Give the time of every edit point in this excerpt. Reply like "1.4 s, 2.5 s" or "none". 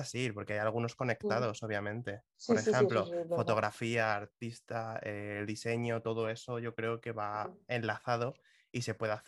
none